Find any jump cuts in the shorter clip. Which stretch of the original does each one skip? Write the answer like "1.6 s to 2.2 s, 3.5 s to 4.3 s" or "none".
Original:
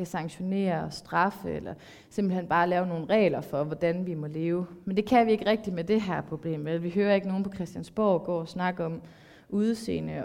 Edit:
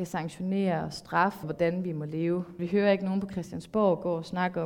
1.4 s to 3.7 s, 4.8 s to 6.8 s